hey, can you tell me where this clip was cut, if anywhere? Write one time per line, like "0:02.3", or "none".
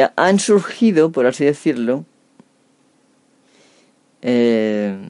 none